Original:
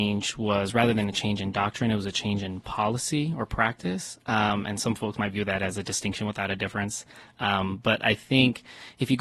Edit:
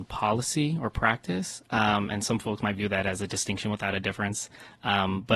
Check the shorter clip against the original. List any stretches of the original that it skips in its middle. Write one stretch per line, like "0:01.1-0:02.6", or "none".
none